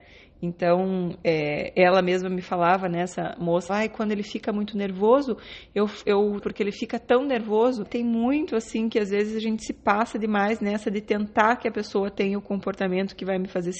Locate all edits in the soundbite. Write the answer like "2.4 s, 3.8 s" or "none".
3.7 s, 6.4 s, 7.8 s